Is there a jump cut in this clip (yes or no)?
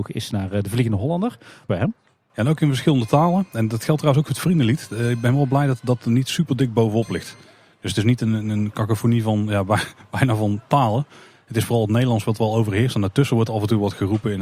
yes